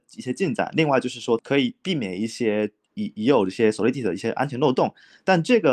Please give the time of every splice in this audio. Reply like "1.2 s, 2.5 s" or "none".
1.4 s